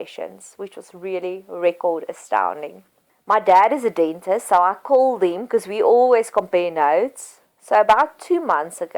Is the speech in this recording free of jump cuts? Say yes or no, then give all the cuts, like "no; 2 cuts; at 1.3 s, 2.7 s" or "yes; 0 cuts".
no; 2 cuts; at 3.1 s, 7.5 s